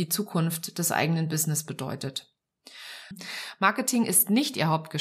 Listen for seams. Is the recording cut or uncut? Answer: cut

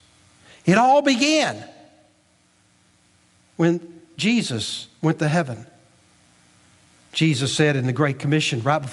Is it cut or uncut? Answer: uncut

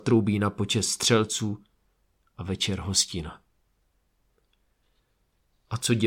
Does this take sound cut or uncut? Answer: uncut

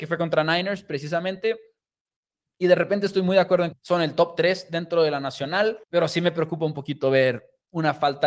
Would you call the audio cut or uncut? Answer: cut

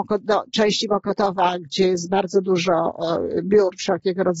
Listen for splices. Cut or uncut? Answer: uncut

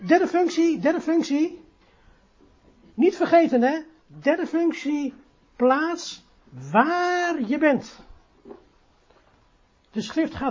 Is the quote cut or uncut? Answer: cut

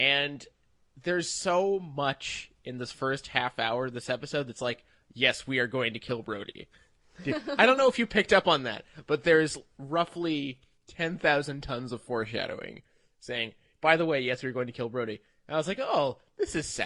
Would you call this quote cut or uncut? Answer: uncut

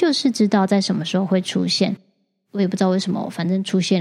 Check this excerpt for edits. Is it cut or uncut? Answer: uncut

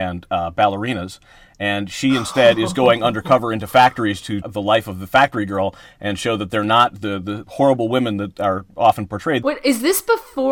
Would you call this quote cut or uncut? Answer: cut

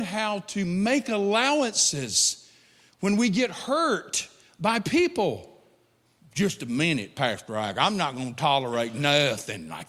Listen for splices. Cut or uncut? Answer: cut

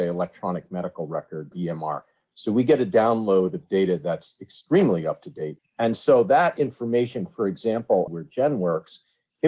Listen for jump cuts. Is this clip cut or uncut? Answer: cut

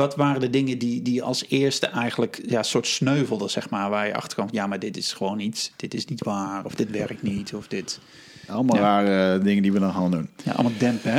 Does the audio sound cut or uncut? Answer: cut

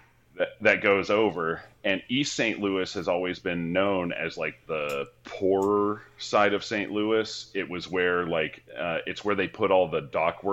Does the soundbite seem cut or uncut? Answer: uncut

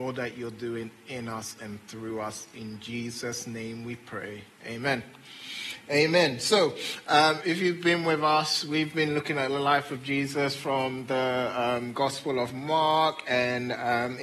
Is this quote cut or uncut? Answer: uncut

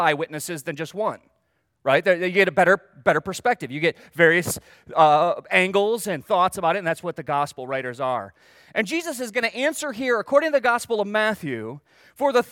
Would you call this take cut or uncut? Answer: uncut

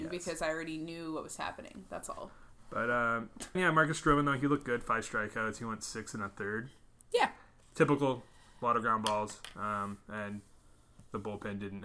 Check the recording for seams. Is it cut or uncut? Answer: cut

